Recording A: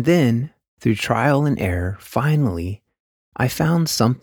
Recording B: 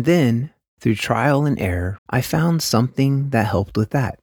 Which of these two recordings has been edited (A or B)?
B